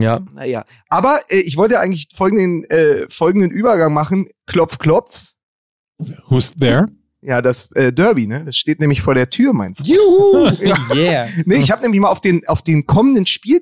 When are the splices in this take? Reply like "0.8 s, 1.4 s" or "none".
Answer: none